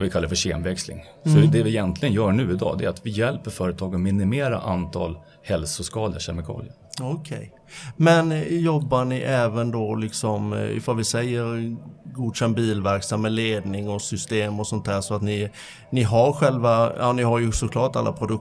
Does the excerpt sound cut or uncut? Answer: uncut